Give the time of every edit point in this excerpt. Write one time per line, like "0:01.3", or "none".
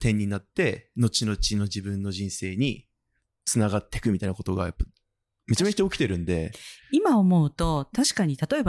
none